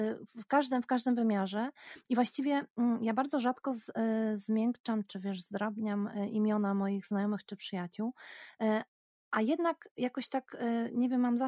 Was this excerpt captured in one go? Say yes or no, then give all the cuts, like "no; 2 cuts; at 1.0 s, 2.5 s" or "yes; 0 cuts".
yes; 0 cuts